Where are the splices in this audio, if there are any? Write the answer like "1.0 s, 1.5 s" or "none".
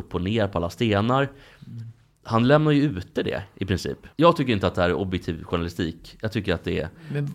4.1 s